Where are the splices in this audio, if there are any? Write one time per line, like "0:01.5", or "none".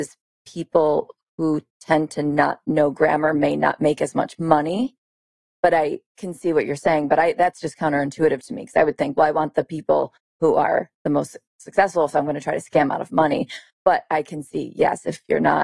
none